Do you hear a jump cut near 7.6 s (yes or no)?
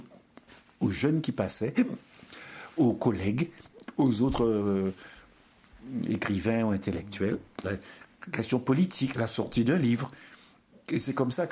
yes